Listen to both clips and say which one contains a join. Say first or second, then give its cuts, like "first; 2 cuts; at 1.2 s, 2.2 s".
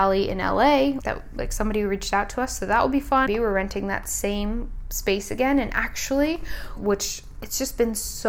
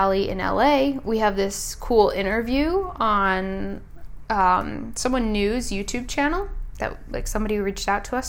first; 3 cuts; at 1.0 s, 3.3 s, 6.8 s